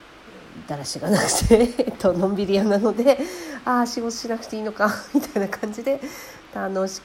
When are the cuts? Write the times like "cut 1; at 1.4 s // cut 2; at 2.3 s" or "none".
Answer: none